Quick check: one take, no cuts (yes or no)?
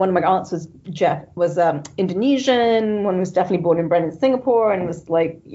yes